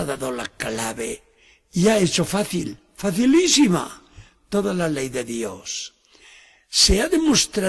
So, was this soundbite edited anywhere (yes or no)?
no